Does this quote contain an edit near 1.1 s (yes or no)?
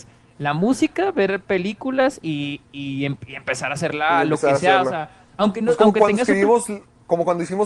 no